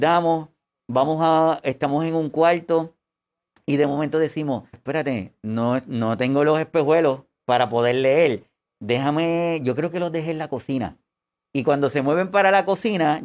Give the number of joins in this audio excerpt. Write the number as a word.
one